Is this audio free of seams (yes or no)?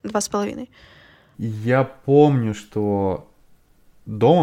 no